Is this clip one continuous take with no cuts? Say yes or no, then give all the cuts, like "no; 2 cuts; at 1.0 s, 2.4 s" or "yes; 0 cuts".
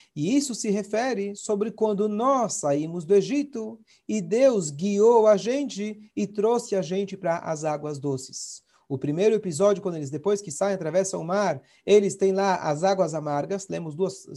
yes; 0 cuts